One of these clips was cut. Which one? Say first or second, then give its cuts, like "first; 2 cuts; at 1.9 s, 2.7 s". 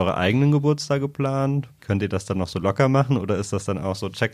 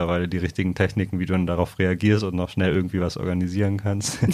first; 1 cut; at 1.8 s